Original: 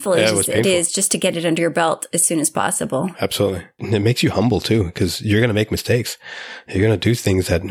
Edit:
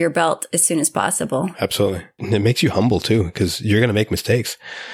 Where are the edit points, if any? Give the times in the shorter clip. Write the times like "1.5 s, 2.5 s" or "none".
none